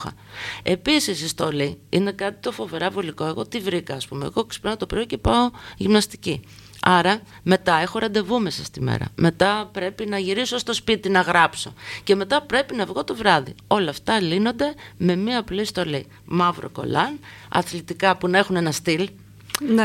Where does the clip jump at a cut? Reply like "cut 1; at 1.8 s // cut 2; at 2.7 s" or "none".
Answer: none